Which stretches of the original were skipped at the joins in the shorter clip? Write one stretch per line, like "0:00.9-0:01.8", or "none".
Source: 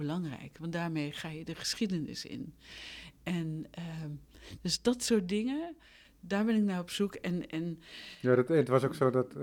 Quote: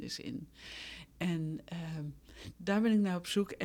0:04.6-0:06.2